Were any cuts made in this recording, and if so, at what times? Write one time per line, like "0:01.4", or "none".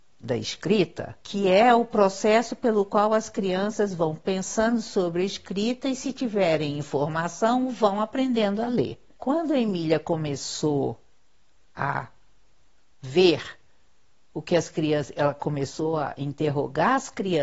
0:01.2